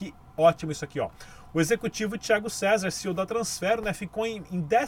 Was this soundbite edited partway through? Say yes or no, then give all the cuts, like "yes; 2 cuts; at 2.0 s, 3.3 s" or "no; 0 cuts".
no; 0 cuts